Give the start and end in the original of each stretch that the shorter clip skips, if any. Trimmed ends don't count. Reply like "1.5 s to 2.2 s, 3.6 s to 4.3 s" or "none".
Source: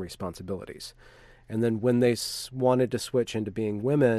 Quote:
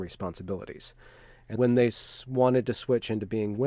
1.6 s to 1.8 s